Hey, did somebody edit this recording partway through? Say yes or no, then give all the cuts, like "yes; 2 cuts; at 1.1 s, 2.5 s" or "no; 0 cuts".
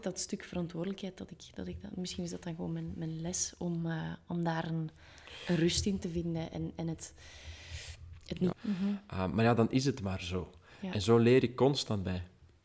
yes; 1 cut; at 8.5 s